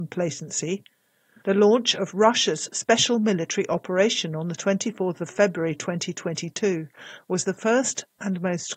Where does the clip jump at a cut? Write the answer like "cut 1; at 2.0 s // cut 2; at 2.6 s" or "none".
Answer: cut 1; at 1.4 s